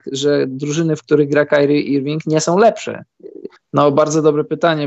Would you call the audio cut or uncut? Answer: cut